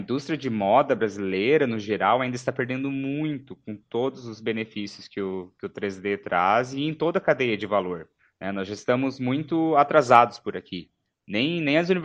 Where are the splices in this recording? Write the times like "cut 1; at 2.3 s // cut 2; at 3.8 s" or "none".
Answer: none